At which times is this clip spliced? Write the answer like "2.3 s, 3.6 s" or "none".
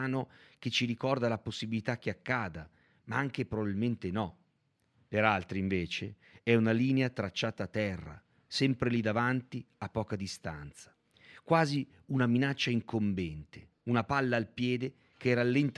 13.8 s